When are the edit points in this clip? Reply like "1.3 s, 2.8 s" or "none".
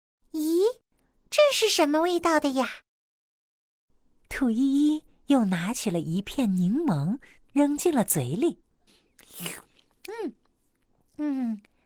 none